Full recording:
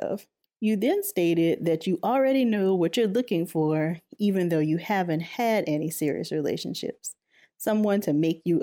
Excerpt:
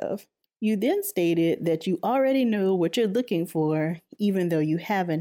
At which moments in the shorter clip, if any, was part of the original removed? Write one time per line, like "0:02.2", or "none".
none

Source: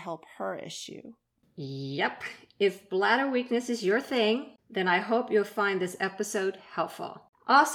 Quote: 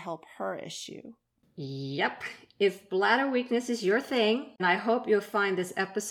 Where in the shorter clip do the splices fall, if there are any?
0:04.6

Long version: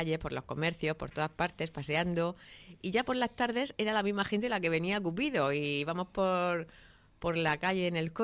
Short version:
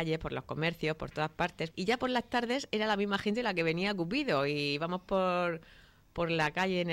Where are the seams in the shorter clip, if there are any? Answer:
0:01.7

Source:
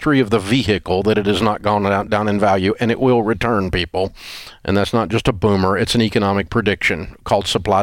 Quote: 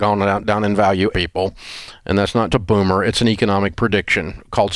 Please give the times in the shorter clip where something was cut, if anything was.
0:01.1
0:02.5

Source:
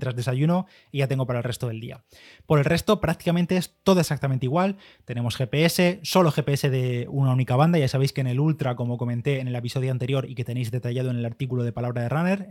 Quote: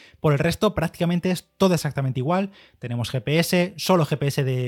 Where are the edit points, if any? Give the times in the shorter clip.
none

